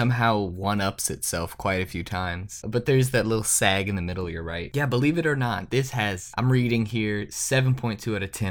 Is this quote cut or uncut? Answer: uncut